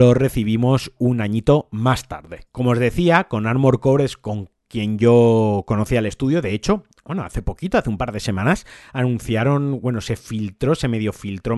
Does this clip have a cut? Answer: yes; 1 cut; at 2.5 s

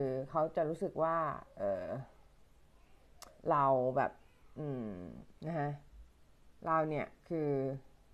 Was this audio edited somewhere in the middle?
yes; 2 cuts; at 3.4 s, 5.4 s

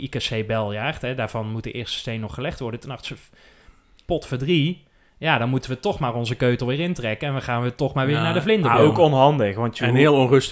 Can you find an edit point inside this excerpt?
no; 0 cuts

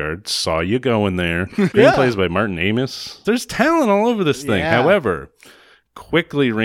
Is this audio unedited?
no; 2 cuts; at 1.7 s, 3.2 s

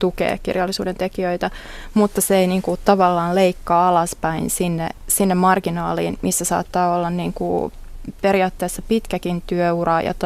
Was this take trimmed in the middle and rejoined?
no; 0 cuts

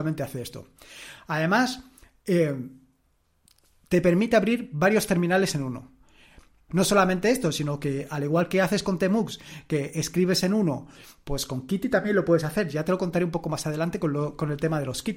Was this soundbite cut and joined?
yes; 1 cut; at 6.7 s

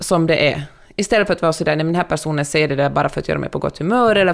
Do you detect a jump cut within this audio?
no; 0 cuts

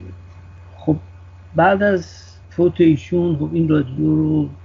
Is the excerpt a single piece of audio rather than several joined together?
no; 1 cut; at 2.4 s

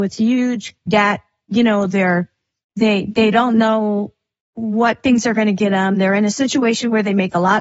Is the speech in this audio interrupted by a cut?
no; 0 cuts

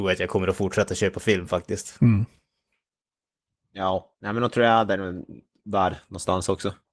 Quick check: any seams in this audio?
no; 0 cuts

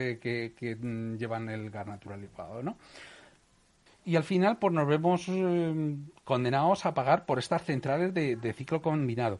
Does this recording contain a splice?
yes; 1 cut; at 3.9 s

